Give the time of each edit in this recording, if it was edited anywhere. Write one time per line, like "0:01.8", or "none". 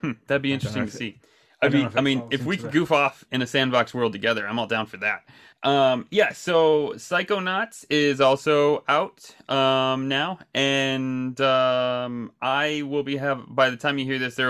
0:03.3
0:05.5